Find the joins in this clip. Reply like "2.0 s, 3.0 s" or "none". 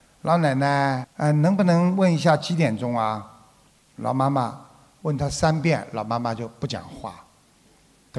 1.0 s